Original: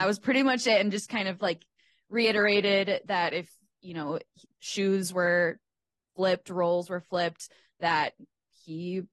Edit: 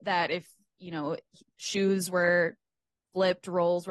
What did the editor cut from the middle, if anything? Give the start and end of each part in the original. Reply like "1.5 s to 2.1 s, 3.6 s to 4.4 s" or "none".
none